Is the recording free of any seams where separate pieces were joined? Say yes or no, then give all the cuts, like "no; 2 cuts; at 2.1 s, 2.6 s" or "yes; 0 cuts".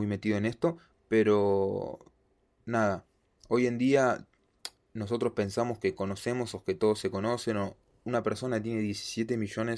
yes; 0 cuts